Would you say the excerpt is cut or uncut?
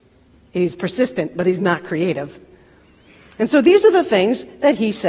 uncut